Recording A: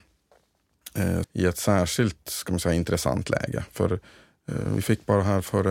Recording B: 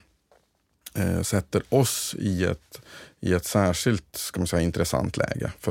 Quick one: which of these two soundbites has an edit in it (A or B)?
A